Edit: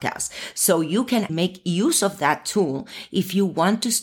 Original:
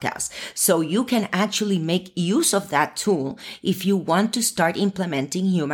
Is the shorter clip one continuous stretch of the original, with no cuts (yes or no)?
no